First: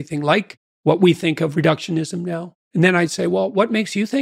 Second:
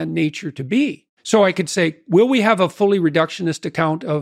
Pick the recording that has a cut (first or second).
first